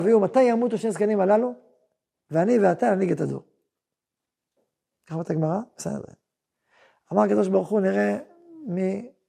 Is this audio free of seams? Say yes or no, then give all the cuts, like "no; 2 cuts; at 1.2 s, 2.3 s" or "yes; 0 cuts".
yes; 0 cuts